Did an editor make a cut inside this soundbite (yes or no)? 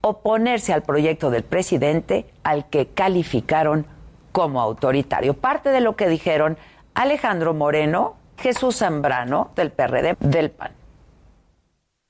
yes